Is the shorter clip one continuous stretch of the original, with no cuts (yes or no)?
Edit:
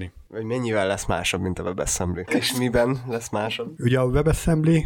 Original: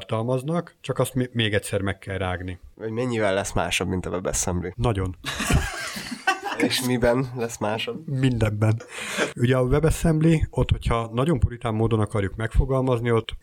no